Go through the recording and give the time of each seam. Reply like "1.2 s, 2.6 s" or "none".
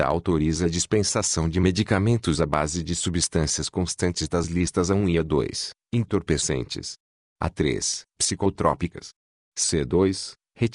8.1 s